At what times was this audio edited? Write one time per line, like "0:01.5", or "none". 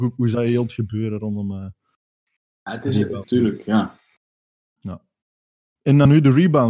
0:03.2